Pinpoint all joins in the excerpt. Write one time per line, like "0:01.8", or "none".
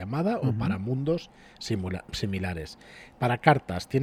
0:03.1